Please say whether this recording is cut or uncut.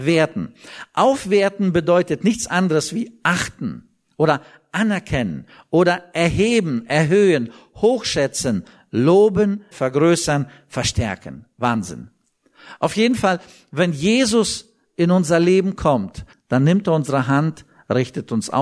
cut